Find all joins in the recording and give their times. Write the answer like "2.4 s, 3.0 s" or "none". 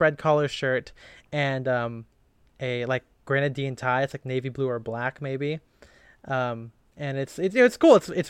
none